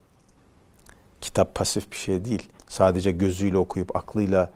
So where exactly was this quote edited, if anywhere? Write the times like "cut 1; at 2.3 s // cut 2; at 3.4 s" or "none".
cut 1; at 2.6 s